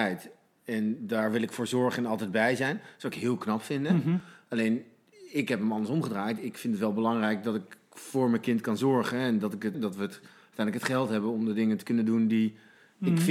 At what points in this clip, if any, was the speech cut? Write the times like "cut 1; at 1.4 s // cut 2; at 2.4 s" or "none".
cut 1; at 9.7 s